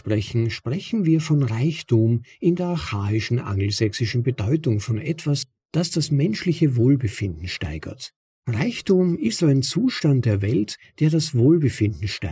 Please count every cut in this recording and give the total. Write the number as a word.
two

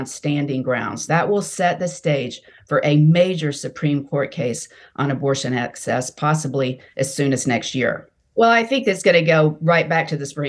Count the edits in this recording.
one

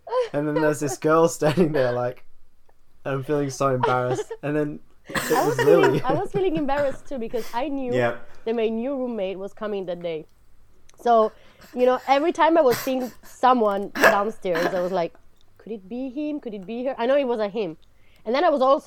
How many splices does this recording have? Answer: zero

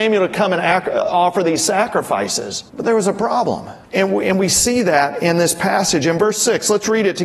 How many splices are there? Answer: two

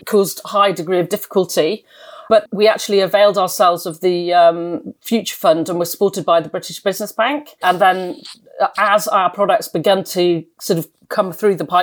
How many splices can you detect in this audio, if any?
two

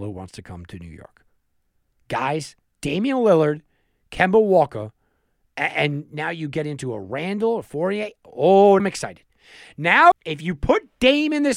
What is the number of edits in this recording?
two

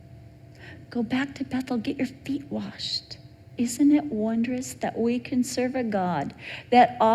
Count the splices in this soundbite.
one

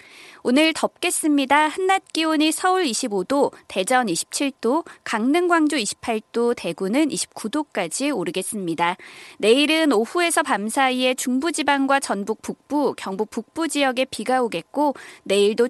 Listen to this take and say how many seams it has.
zero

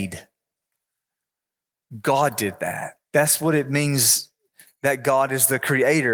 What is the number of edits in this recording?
one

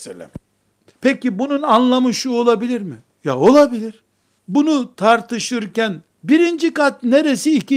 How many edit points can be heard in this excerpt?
two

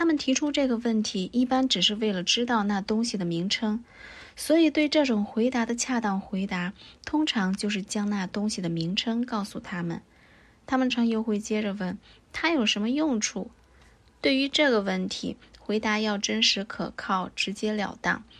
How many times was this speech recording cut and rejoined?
one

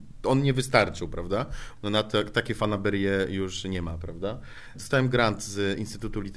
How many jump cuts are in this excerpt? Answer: two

